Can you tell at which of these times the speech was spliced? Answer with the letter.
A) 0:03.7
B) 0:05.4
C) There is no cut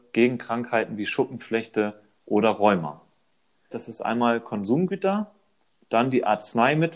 A